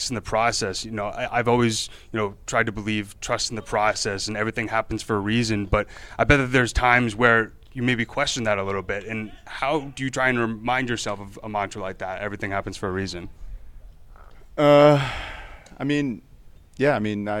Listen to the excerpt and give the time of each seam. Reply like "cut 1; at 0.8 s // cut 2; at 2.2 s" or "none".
none

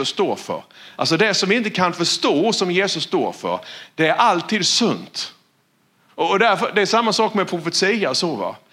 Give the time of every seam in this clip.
cut 1; at 1.0 s // cut 2; at 6.1 s

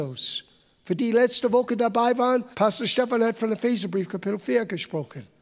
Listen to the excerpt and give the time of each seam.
cut 1; at 1.0 s // cut 2; at 2.5 s

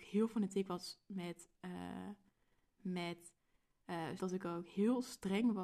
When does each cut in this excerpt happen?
cut 1; at 2.8 s // cut 2; at 4.2 s

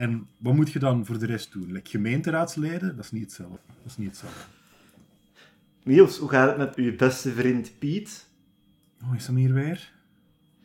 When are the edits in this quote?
cut 1; at 3.6 s // cut 2; at 6.7 s

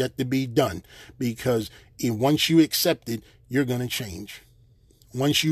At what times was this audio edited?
none

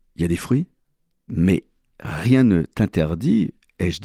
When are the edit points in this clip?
cut 1; at 1.3 s

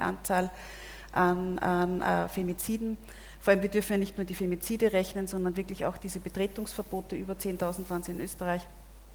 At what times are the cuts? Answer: none

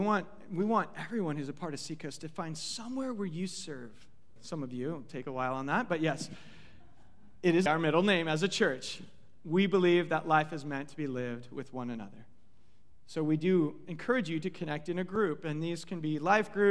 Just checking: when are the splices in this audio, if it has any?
cut 1; at 4.4 s // cut 2; at 7.7 s

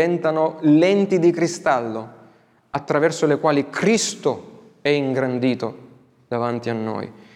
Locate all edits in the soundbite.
none

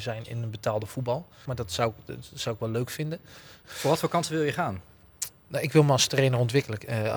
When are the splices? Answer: cut 1; at 1.5 s // cut 2; at 3.6 s

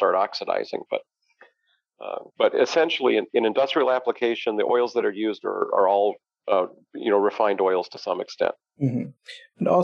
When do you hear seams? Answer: cut 1; at 2.3 s

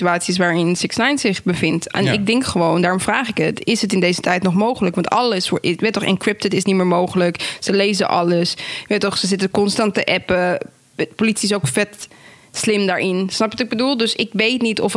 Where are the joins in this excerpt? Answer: none

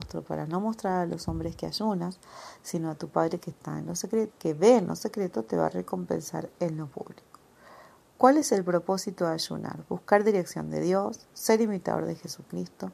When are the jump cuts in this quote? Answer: cut 1; at 4.3 s

